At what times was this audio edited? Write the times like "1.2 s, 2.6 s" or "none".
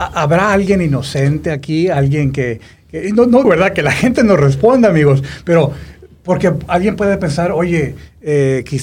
3.4 s